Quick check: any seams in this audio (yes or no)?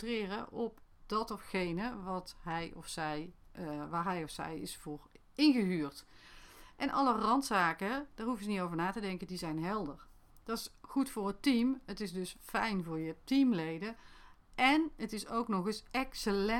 no